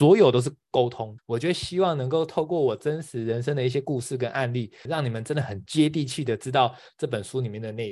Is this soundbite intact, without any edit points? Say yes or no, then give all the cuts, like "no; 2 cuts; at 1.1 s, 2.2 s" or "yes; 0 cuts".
no; 2 cuts; at 1.2 s, 4.9 s